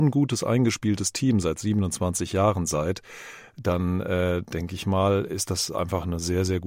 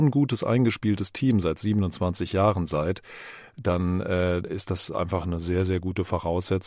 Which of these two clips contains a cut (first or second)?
second